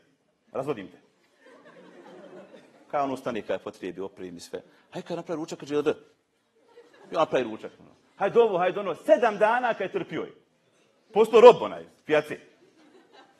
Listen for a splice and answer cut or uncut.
uncut